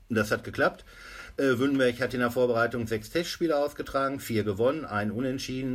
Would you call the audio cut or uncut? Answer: uncut